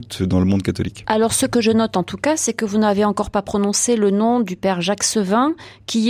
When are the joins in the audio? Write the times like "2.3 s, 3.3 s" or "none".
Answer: none